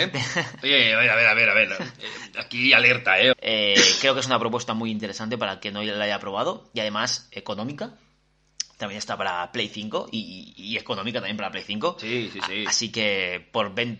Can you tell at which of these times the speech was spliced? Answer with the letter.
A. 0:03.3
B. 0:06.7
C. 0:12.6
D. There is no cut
A